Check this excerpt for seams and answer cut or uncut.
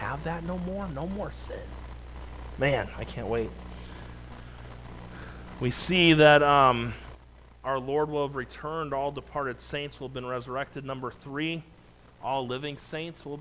uncut